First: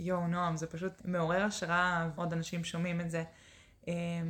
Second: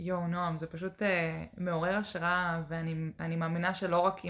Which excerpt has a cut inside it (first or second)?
first